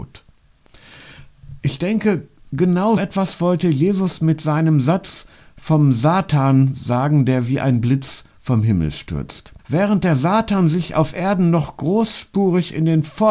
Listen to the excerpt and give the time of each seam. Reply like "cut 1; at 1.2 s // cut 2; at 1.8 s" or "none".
cut 1; at 3.0 s // cut 2; at 9.6 s